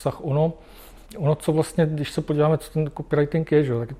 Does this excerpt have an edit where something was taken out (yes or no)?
yes